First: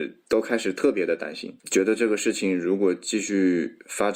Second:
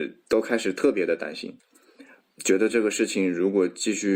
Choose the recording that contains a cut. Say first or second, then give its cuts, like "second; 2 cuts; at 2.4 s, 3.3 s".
first; 1 cut; at 1.6 s